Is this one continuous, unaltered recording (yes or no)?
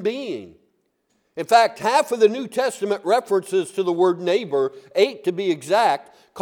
yes